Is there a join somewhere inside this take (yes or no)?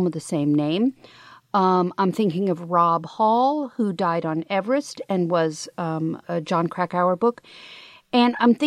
yes